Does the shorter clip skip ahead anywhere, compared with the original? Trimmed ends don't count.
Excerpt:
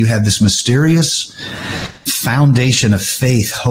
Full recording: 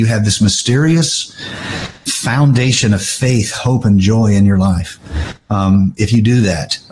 no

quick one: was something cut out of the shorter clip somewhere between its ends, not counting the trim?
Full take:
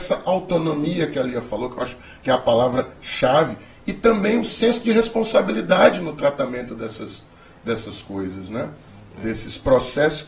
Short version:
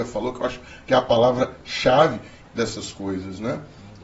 yes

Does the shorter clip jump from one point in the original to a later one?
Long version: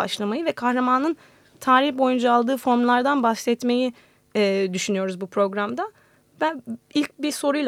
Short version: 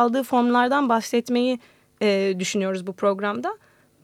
no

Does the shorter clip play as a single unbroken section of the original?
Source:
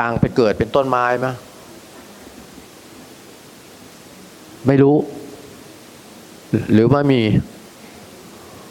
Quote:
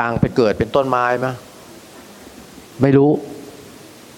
no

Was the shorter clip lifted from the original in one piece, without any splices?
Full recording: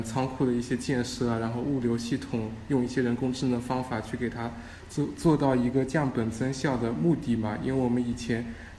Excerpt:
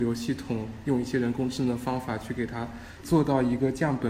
no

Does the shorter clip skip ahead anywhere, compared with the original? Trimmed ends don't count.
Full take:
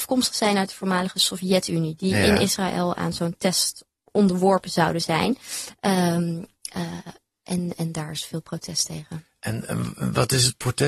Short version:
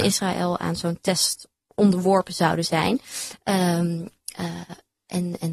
no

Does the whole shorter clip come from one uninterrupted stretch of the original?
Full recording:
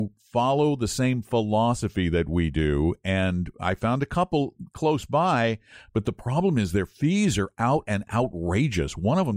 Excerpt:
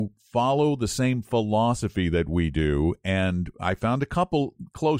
yes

